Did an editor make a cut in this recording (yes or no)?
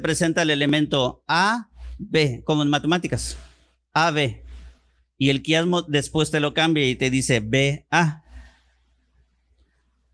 no